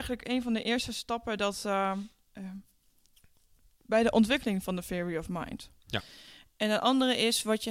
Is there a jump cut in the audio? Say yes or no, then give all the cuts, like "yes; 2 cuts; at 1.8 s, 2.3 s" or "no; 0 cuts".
no; 0 cuts